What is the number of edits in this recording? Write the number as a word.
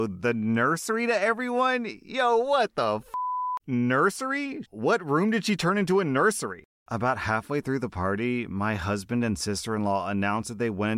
three